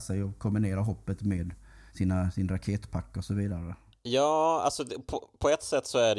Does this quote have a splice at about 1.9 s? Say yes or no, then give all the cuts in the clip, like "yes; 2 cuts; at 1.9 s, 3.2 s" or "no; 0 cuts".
yes; 1 cut; at 1.9 s